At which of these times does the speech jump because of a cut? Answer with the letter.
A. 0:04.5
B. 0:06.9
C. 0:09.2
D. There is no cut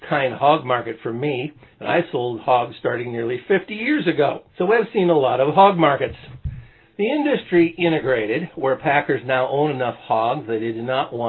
A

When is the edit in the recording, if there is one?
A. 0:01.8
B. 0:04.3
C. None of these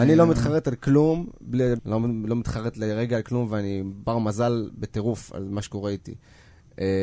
A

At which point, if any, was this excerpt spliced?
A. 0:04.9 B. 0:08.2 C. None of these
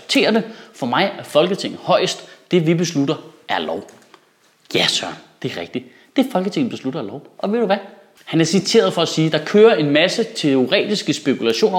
B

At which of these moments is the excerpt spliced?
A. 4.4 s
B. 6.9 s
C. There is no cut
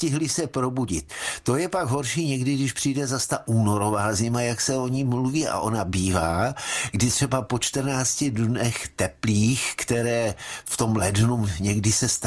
C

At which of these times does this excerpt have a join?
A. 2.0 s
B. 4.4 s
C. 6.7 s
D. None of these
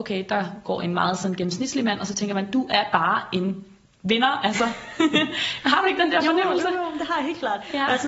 D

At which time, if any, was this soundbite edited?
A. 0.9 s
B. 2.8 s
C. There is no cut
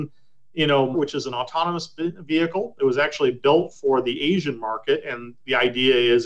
A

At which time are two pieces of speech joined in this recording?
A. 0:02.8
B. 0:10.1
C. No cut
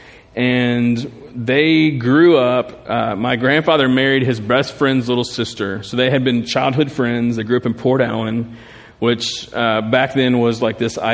C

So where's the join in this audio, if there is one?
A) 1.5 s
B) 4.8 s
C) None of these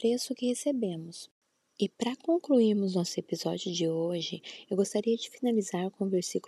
C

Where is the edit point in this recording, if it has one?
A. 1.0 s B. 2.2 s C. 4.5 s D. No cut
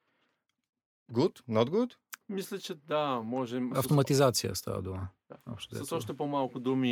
B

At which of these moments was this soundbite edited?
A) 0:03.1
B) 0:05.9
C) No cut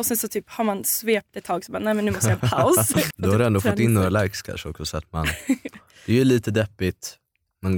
A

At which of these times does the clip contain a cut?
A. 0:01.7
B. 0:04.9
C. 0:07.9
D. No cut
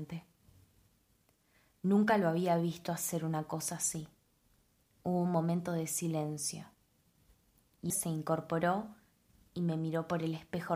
C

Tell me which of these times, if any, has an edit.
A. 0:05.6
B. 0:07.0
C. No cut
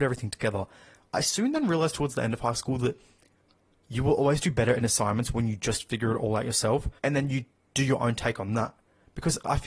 B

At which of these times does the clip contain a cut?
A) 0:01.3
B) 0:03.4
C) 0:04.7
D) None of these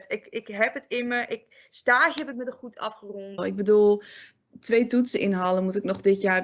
B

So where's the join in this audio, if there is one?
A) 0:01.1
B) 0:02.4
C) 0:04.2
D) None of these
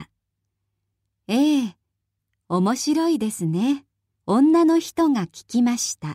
C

